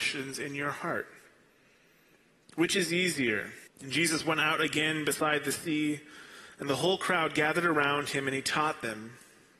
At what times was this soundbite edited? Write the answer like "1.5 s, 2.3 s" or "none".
3.7 s